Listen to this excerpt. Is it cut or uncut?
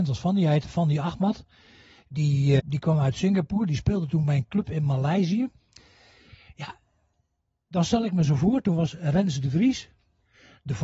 cut